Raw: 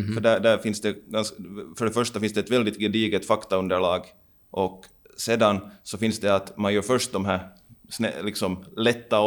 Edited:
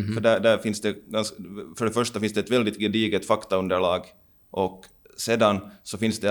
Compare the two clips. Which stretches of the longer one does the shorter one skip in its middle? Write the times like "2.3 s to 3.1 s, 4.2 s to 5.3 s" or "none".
none

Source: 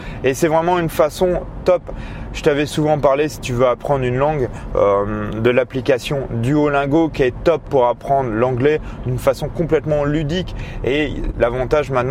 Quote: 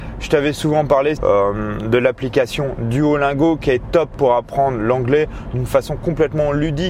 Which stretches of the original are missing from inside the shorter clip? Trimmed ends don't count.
3.3 s to 4.7 s

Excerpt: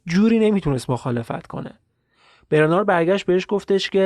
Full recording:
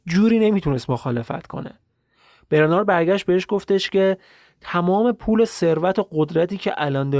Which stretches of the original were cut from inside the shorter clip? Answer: none

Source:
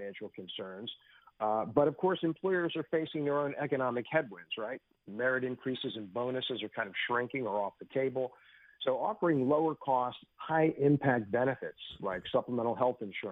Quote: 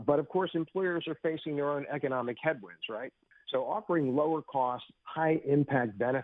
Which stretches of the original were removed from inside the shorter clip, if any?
5.0 s to 8.6 s

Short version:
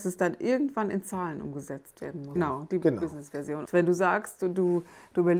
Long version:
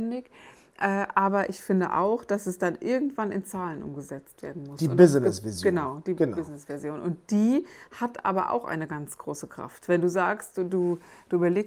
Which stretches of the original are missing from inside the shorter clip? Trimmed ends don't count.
4.8 s to 5.7 s, 7.0 s to 9.8 s

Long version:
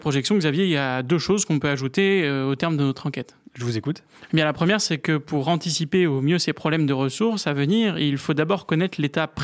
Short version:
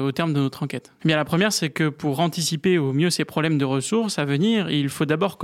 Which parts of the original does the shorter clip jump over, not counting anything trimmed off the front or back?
3.4 s to 4.3 s

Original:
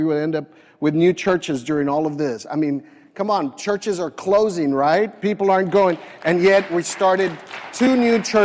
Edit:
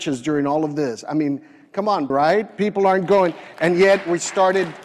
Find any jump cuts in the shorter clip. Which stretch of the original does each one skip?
3.5 s to 4.7 s

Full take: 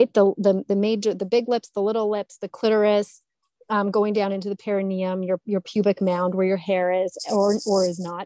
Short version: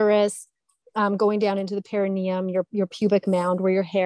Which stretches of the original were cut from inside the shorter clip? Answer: none

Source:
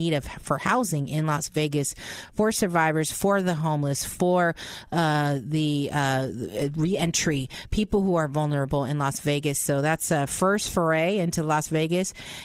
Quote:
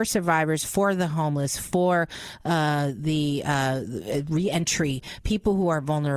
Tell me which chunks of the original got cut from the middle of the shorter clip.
none

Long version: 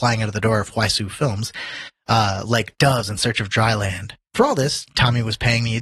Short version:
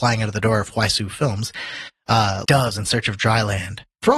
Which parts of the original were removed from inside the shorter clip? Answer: 2.4 s to 2.8 s

